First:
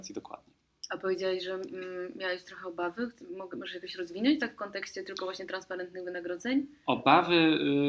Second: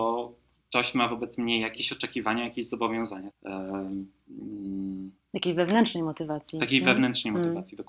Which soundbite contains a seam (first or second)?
second